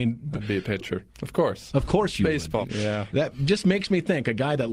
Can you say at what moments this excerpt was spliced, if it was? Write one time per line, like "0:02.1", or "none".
0:01.1
0:02.6

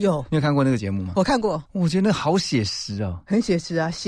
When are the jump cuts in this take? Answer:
0:01.7

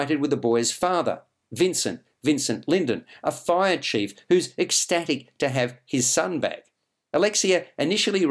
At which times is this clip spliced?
none

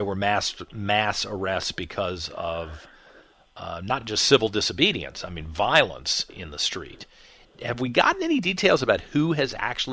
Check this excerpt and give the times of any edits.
none

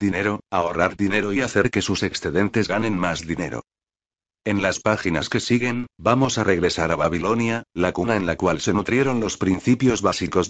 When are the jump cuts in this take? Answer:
none

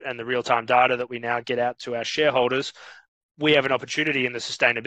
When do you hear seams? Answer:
none

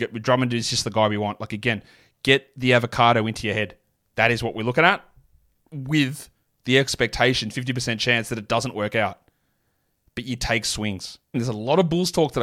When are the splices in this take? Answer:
0:11.3

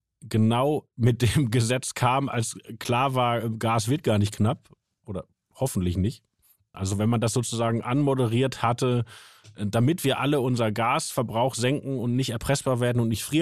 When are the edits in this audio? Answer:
0:06.7

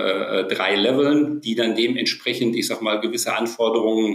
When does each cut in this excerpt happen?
none

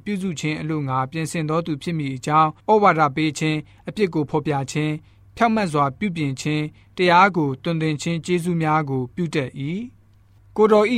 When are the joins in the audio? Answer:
0:02.6

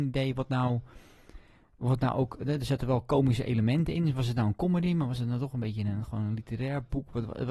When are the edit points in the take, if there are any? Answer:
none

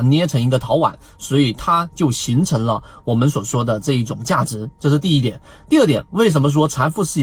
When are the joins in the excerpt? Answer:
none

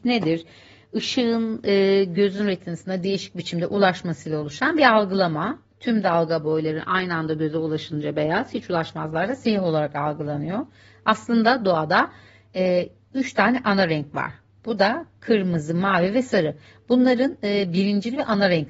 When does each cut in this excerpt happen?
none

